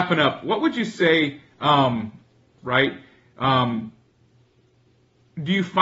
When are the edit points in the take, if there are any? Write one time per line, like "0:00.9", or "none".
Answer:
0:02.6